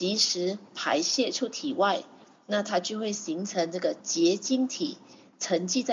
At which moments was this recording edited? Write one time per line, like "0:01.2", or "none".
none